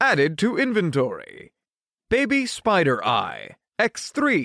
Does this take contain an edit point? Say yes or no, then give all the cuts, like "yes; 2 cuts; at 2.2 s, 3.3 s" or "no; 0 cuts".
yes; 1 cut; at 1.9 s